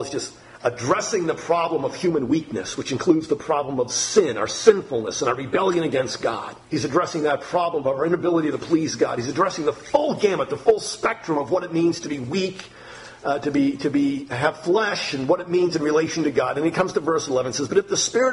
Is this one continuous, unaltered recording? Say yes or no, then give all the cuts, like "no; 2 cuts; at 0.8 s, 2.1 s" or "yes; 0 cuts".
no; 1 cut; at 6.7 s